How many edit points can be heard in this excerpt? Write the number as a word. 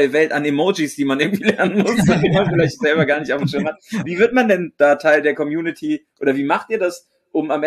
zero